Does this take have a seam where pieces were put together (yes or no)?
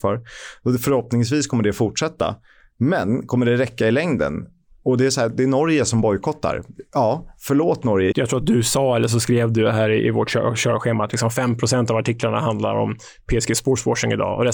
yes